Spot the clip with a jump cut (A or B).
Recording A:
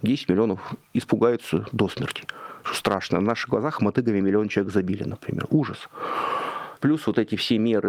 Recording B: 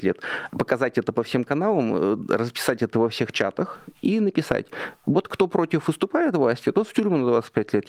A